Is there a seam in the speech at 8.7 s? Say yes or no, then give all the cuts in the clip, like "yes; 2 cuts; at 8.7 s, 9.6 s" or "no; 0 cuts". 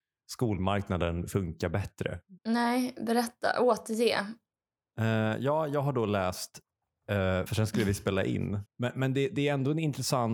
yes; 3 cuts; at 2.4 s, 7.5 s, 8.7 s